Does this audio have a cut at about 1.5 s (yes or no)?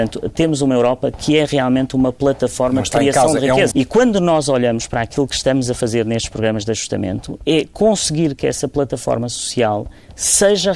no